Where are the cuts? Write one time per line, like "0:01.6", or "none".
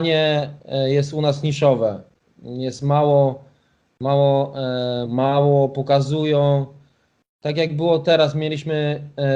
0:05.0